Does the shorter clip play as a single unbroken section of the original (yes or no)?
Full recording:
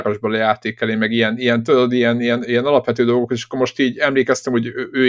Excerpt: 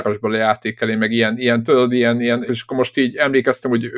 no